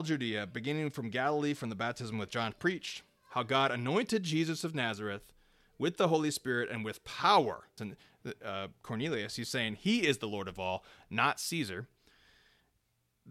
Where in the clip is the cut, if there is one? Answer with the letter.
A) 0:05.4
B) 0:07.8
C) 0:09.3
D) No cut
B